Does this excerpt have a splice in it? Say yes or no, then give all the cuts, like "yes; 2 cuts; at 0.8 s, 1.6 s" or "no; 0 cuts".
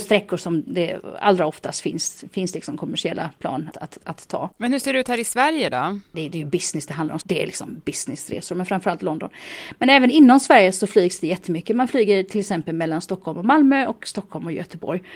yes; 3 cuts; at 3.7 s, 6.1 s, 7.2 s